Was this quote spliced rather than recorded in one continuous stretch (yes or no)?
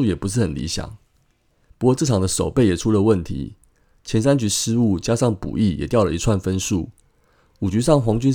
yes